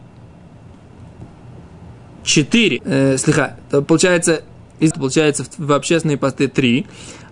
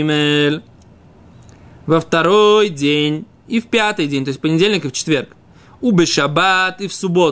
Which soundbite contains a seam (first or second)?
first